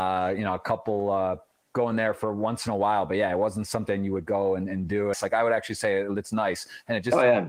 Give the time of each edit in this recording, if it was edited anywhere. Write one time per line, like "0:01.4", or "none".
0:05.1